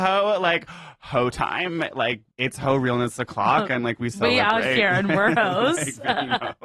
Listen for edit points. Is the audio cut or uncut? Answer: uncut